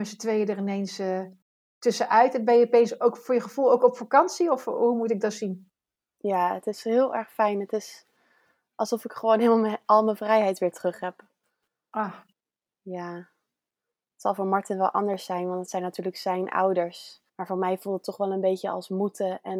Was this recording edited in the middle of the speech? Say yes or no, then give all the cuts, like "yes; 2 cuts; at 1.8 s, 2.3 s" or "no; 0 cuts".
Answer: yes; 1 cut; at 17.3 s